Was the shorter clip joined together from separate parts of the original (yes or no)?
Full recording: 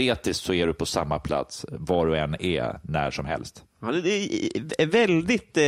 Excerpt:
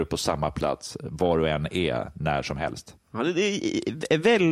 no